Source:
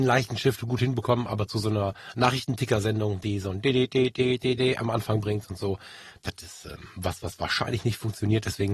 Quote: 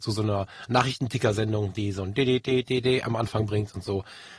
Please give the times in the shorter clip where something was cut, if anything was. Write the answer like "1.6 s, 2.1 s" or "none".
2.6 s